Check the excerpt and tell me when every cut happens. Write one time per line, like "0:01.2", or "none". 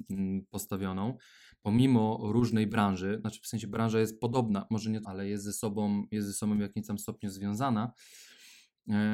0:05.0